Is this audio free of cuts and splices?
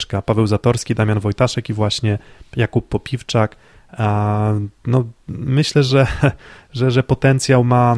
yes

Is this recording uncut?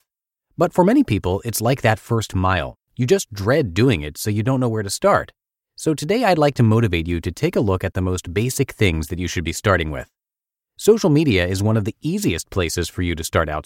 yes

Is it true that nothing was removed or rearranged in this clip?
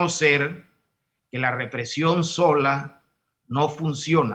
yes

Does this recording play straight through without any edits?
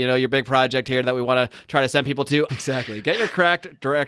no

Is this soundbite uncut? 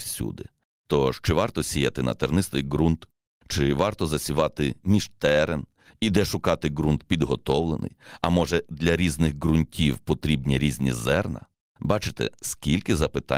yes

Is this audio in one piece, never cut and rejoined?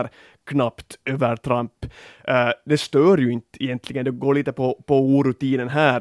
yes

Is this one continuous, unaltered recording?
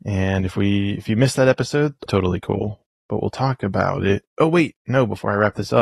no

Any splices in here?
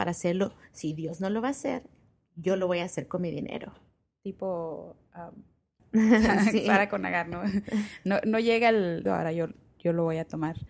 yes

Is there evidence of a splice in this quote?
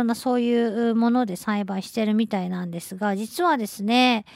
no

